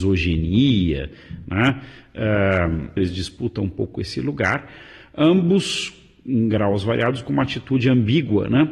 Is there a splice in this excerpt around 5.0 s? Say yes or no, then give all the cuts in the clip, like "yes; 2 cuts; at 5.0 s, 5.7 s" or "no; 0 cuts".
no; 1 cut; at 3.0 s